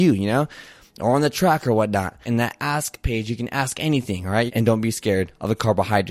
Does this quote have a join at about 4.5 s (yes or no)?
yes